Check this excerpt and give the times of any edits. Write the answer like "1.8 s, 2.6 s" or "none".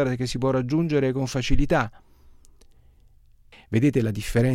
3.5 s

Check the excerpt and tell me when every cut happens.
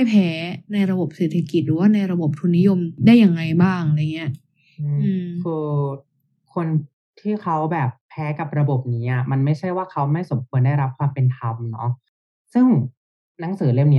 none

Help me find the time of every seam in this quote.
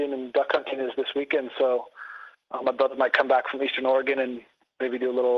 none

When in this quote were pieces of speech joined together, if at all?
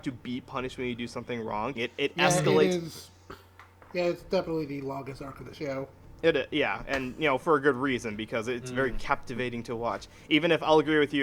1.8 s

